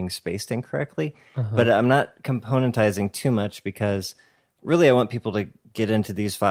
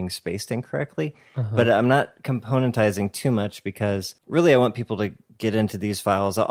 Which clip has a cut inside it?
second; 1 cut; at 4.2 s

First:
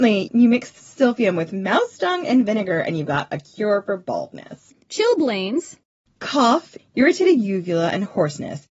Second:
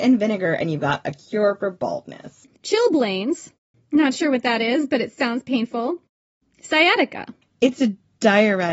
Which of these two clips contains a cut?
second; 1 cut; at 3.7 s

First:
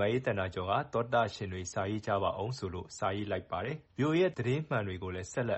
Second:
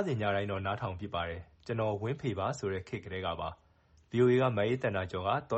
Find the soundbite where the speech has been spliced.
first; 1 cut; at 3.9 s

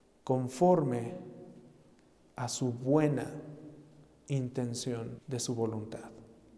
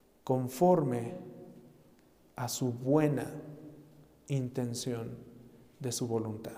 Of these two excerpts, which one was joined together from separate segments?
first; 1 cut; at 5.2 s

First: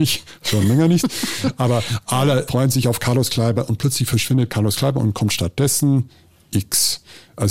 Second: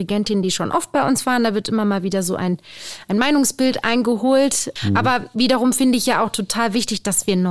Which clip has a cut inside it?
second; 1 cut; at 4.8 s

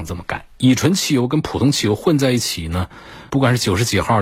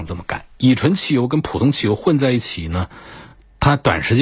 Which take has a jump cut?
first; 1 cut; at 3.3 s

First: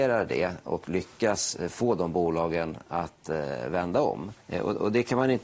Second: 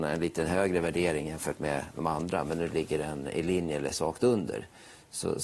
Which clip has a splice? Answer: first; 1 cut; at 4.4 s

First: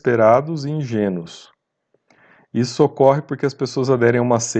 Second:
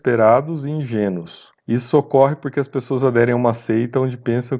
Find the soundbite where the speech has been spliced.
second; 1 cut; at 1.6 s

